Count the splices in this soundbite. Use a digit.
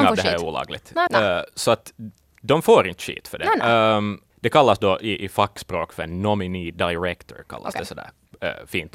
1